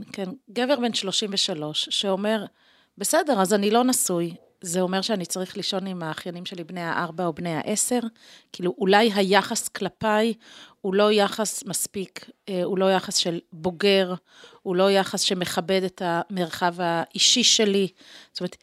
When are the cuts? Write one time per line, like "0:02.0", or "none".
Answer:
none

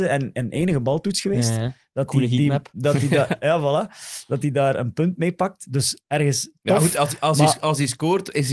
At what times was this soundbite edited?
none

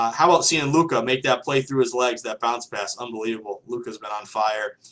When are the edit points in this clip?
none

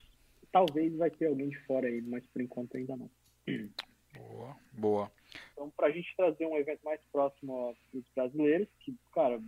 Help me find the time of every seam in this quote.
0:05.5

